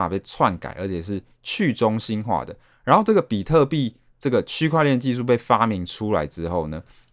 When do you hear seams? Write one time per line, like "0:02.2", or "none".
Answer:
none